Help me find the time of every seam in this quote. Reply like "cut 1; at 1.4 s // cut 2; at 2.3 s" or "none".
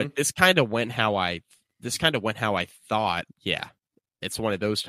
cut 1; at 3.3 s

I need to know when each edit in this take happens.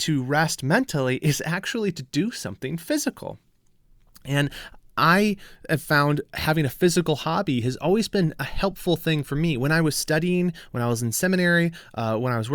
none

